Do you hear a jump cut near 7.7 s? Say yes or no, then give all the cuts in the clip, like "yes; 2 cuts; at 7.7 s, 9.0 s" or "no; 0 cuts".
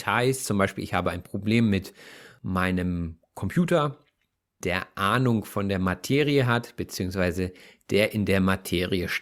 no; 1 cut; at 4.6 s